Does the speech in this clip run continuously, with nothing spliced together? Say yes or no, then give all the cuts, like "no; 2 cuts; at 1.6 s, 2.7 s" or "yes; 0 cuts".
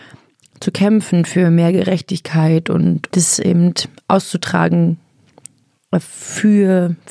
no; 1 cut; at 3.1 s